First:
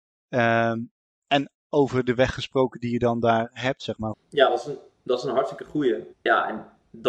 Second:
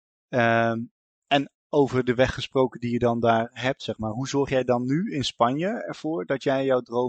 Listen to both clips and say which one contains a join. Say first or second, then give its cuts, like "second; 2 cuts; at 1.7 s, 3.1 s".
first; 2 cuts; at 4.1 s, 6.1 s